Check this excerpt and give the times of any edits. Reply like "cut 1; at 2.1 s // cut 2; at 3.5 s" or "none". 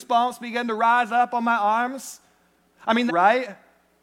cut 1; at 3.1 s